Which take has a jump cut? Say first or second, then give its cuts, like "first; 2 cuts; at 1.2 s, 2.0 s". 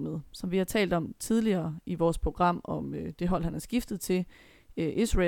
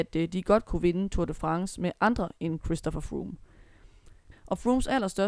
second; 1 cut; at 4.3 s